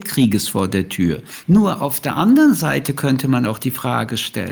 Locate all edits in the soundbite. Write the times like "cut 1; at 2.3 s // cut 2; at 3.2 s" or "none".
cut 1; at 1.4 s